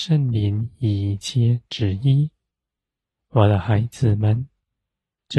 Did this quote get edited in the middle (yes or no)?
yes